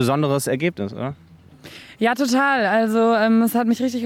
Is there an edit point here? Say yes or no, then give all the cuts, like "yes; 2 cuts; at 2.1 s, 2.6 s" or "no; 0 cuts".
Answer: no; 0 cuts